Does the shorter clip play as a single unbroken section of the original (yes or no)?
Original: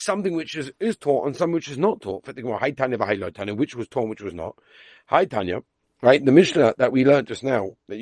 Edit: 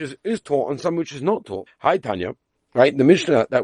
no